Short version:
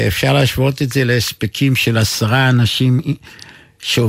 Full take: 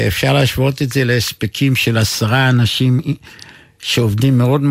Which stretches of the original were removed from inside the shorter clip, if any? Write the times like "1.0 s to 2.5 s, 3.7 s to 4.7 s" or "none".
none